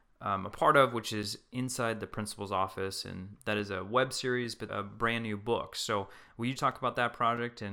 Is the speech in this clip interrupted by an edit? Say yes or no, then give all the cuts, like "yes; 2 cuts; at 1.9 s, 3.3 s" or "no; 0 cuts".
yes; 2 cuts; at 4.7 s, 6.6 s